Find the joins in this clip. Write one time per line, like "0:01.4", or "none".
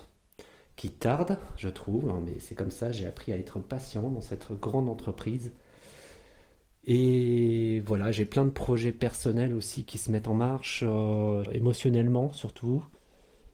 0:11.5